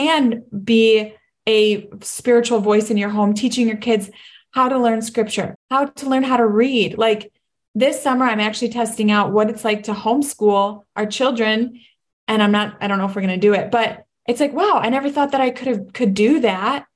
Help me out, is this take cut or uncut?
cut